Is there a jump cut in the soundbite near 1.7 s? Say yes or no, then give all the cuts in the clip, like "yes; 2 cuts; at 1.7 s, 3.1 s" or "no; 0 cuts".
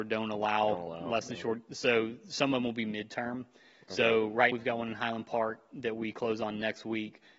no; 1 cut; at 4.5 s